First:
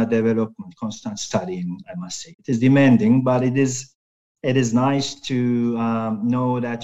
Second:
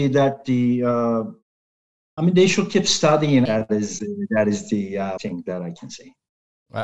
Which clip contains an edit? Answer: second; 2 cuts; at 3.5 s, 5.2 s

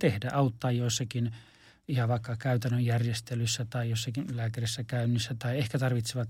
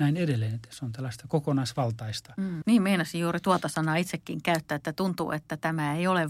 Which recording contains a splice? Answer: second; 1 cut; at 2.6 s

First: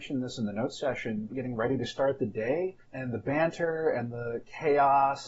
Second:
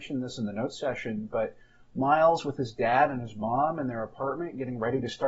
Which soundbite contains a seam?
first; 2 cuts; at 1.3 s, 2.8 s

